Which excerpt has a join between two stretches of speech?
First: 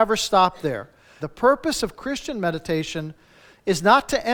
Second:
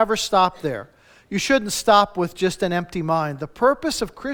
first; 1 cut; at 1.2 s

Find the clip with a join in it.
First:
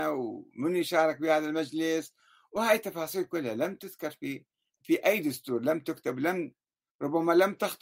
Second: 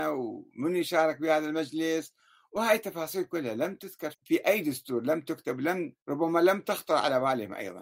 second; 2 cuts; at 4.1 s, 6.0 s

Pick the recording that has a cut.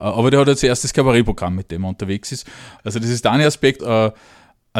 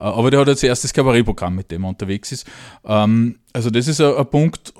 first; 2 cuts; at 2.8 s, 3.8 s

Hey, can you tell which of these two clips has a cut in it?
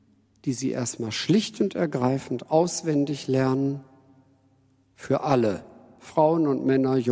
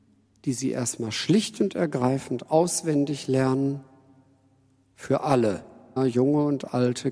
second; 1 cut; at 6.0 s

